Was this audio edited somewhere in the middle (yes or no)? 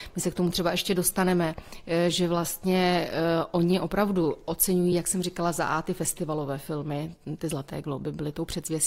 no